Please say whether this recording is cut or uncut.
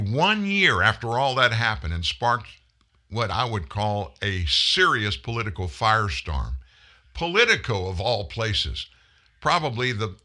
uncut